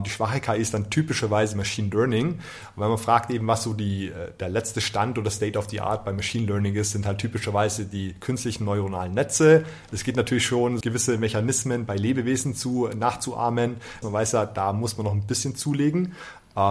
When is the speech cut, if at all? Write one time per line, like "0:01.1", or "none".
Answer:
0:10.8
0:14.0